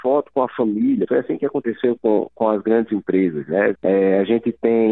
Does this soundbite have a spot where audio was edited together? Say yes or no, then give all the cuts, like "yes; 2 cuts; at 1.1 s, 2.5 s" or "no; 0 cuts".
yes; 2 cuts; at 1.1 s, 3.7 s